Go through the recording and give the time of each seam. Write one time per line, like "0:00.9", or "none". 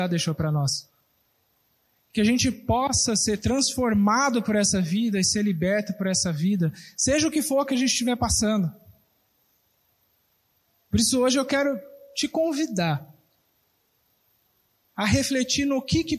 none